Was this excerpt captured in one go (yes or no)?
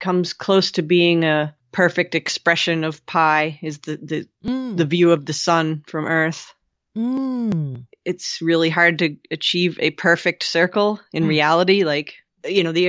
yes